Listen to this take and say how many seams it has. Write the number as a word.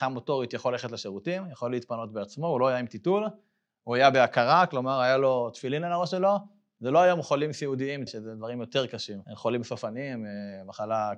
two